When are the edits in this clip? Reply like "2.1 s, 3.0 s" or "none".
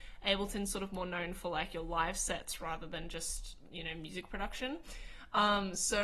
none